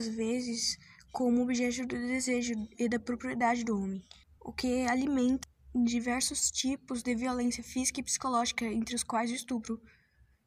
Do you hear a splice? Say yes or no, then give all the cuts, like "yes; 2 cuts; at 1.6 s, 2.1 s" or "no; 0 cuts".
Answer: no; 0 cuts